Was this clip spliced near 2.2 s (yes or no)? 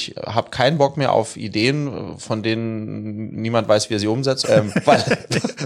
no